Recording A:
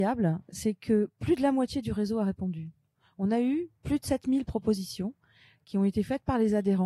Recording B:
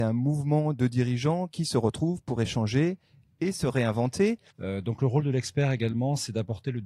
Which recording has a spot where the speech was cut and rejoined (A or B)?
B